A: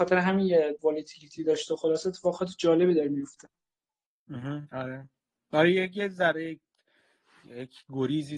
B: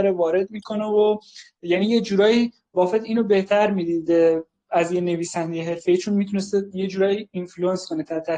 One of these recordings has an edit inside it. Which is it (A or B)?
A